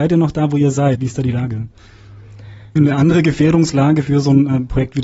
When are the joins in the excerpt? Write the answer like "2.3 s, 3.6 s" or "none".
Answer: 1.0 s, 2.8 s